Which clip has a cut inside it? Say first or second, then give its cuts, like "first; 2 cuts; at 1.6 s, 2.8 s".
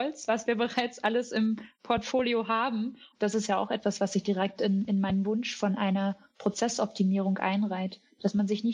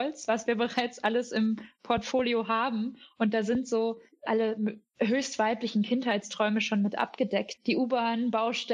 first; 1 cut; at 3.1 s